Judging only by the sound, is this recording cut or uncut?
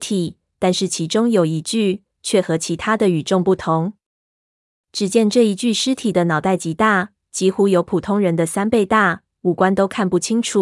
uncut